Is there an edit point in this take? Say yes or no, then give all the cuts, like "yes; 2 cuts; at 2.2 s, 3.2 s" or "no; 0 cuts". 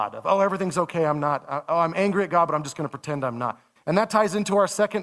yes; 1 cut; at 3.8 s